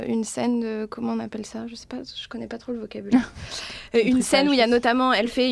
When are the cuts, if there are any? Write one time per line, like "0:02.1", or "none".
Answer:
none

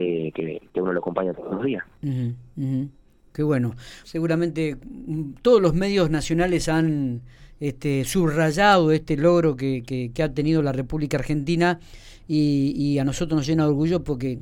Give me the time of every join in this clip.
0:04.0

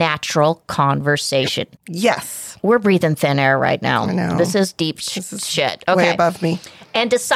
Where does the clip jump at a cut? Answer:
0:01.8

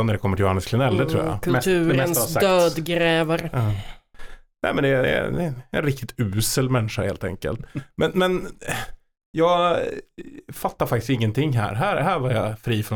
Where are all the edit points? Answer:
none

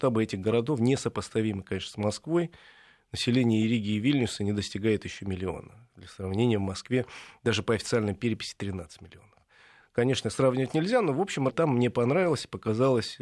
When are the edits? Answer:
0:11.5

